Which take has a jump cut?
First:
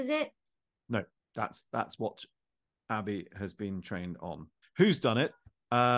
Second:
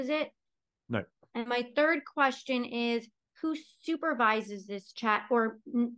first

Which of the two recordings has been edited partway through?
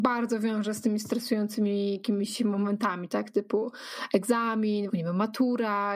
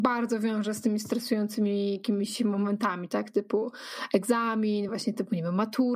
first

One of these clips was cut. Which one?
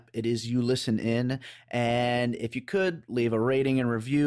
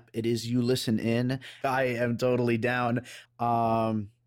second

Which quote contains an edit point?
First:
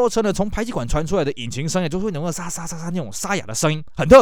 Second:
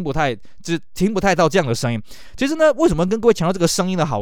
first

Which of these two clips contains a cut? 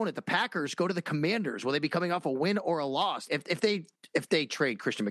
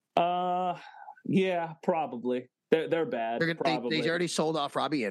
first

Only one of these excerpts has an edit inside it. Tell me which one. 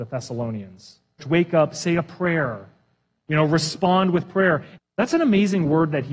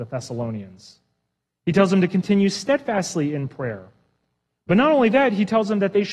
first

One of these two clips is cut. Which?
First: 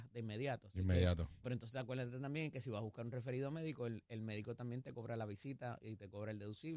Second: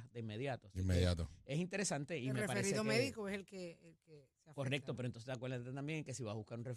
first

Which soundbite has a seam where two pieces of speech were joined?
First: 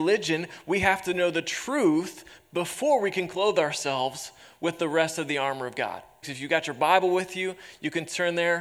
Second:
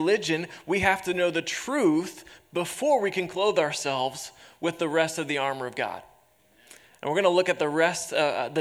first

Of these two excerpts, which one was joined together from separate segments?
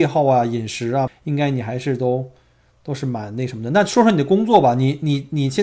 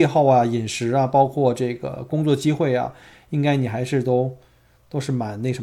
first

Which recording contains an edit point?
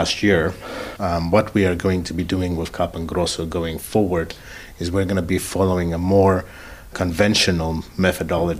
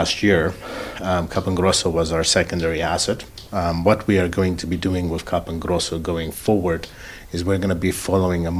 first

